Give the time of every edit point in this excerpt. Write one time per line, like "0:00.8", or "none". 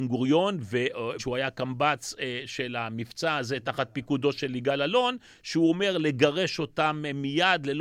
0:01.2